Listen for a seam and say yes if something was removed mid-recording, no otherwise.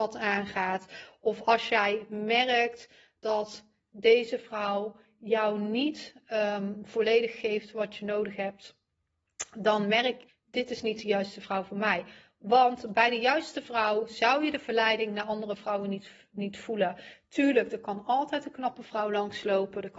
yes